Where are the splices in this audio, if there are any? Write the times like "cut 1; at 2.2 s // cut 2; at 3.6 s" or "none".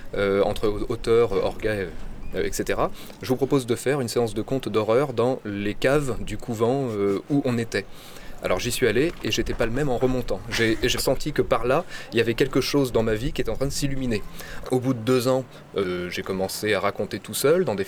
cut 1; at 11.0 s // cut 2; at 14.6 s // cut 3; at 15.8 s